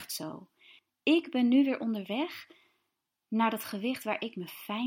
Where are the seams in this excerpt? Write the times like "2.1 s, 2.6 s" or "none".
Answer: none